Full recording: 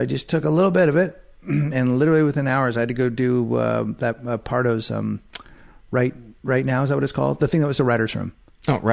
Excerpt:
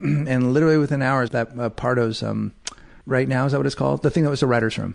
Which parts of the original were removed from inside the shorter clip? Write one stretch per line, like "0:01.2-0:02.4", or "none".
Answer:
0:02.7-0:04.0
0:05.7-0:06.4